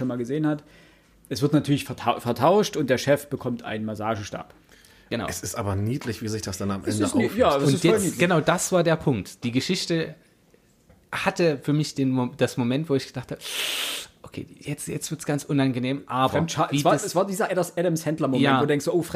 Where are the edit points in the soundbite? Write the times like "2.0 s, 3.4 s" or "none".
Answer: none